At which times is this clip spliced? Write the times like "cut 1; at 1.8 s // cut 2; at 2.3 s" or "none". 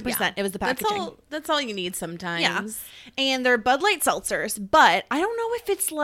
none